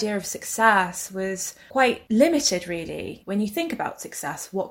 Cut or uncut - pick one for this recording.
cut